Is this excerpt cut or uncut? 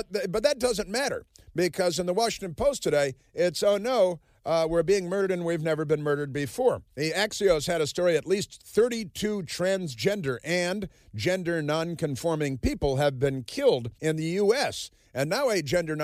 cut